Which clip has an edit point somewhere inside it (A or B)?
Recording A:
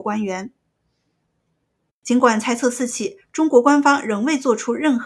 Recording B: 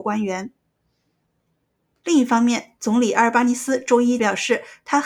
A